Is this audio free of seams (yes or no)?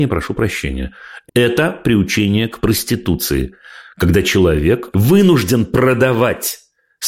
no